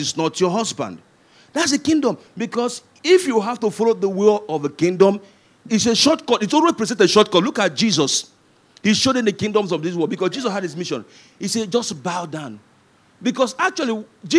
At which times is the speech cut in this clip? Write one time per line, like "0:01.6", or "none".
0:05.7

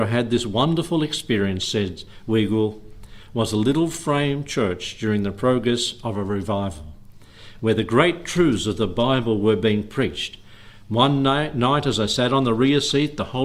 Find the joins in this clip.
none

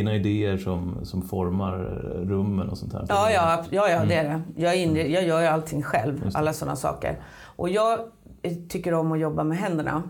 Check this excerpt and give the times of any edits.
none

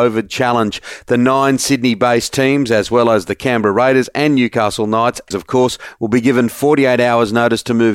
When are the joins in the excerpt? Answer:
0:05.3

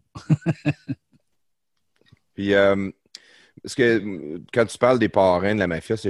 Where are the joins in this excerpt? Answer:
none

